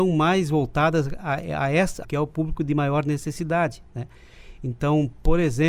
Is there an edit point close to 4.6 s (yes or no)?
no